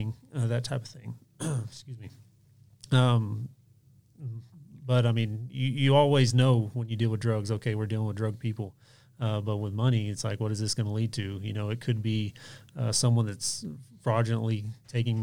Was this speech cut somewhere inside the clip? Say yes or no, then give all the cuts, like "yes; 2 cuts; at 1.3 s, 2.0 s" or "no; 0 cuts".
no; 0 cuts